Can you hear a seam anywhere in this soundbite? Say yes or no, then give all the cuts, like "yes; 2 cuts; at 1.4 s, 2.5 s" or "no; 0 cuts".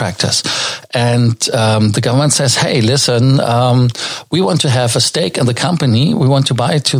no; 0 cuts